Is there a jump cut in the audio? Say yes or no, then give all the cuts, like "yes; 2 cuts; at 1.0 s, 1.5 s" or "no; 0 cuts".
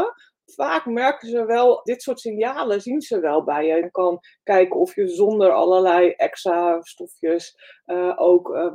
yes; 2 cuts; at 1.9 s, 3.8 s